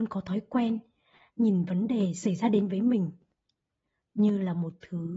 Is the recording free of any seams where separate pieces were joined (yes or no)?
yes